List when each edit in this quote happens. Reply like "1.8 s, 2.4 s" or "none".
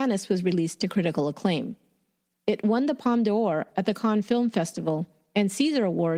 none